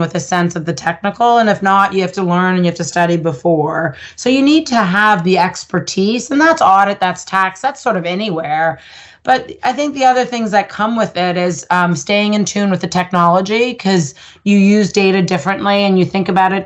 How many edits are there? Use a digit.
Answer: 0